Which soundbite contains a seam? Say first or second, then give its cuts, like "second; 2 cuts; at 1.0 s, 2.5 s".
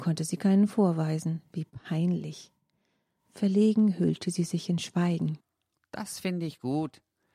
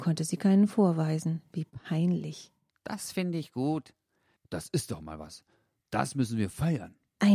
second; 2 cuts; at 2.7 s, 4.4 s